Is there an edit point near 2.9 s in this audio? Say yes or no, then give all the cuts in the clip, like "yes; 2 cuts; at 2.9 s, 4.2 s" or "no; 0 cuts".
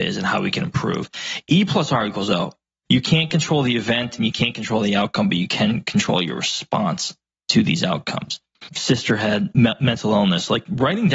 yes; 2 cuts; at 2.9 s, 8.7 s